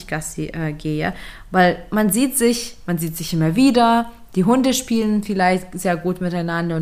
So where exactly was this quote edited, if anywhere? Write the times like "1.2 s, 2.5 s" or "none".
none